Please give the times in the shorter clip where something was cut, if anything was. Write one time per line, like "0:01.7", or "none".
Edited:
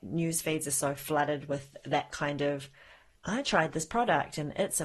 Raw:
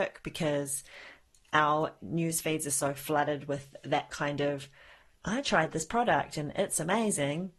none